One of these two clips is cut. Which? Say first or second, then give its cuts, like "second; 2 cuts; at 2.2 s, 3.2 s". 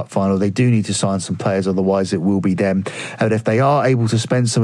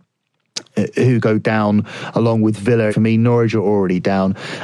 second; 1 cut; at 2.9 s